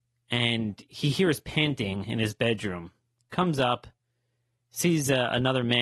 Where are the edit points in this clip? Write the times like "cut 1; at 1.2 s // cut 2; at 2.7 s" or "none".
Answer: none